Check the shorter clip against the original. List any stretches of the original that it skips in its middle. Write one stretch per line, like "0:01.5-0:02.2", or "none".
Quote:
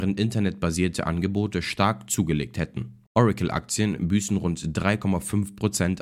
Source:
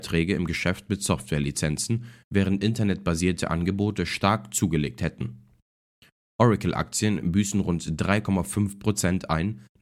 0:05.5-0:06.3